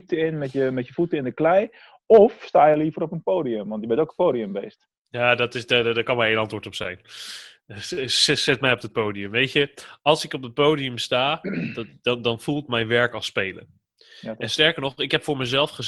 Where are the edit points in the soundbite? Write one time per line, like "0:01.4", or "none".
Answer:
none